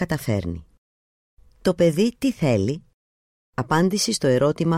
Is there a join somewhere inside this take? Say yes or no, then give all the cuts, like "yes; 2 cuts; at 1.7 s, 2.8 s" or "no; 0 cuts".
yes; 1 cut; at 1.5 s